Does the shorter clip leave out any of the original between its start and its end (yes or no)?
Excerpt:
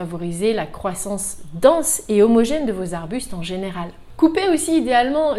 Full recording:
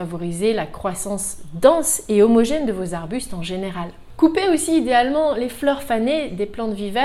no